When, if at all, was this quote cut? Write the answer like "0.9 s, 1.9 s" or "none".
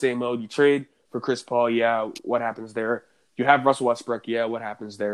none